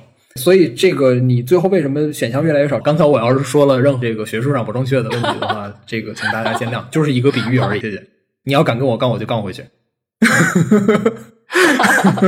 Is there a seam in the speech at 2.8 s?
yes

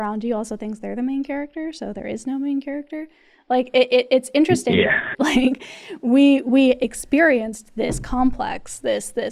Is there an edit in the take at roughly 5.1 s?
yes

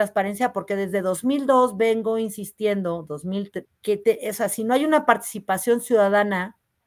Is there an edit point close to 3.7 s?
yes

